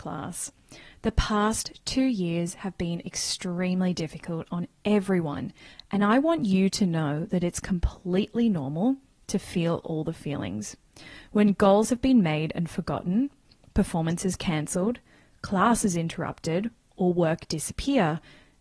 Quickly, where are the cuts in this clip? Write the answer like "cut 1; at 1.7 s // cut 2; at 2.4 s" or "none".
none